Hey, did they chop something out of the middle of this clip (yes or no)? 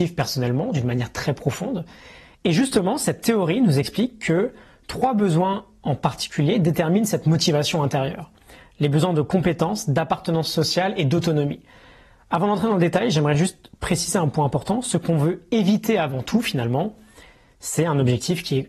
no